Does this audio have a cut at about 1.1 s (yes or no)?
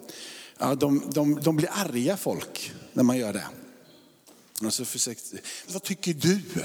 no